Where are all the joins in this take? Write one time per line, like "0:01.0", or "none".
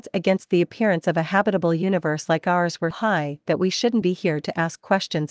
0:02.9
0:04.0